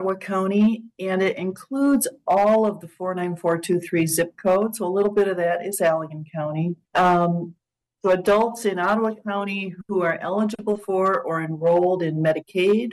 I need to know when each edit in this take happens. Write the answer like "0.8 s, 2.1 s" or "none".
6.8 s

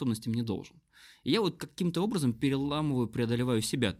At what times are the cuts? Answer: none

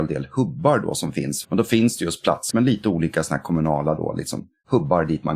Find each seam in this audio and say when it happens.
1.4 s, 2.5 s

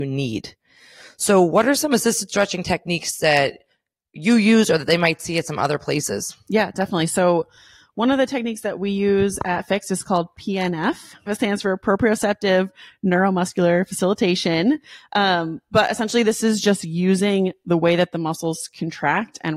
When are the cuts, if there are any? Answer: 11.3 s

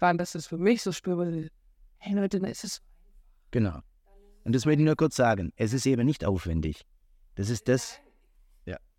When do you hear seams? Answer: none

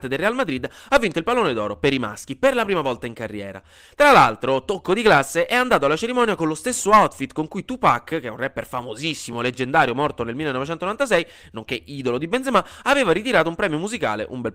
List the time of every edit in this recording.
none

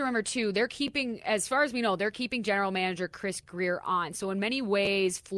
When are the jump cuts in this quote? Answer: none

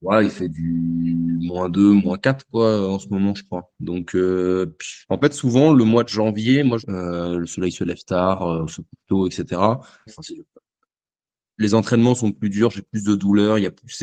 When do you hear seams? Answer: 5.0 s, 6.8 s, 10.1 s

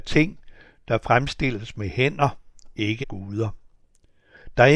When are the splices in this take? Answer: 3.0 s

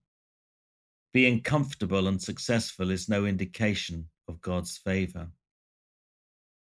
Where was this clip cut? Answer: 0.9 s, 4.2 s

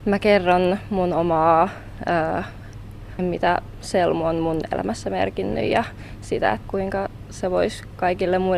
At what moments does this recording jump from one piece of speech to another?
3.2 s, 6.6 s

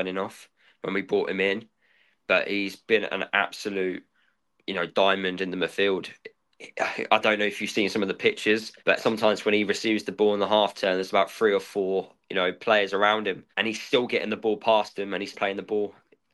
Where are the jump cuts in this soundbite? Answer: 8.8 s, 13.5 s, 15.3 s

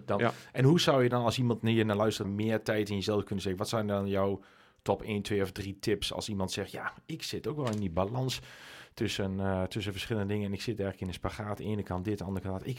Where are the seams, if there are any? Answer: 2.2 s

